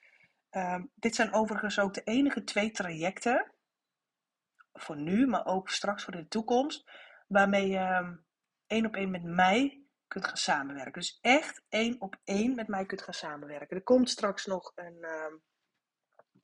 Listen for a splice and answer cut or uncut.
uncut